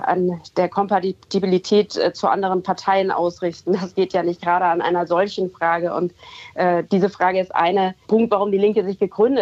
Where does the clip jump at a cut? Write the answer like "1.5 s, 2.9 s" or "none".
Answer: 6.9 s, 8.0 s